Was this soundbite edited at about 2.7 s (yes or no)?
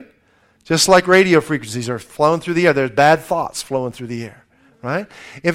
no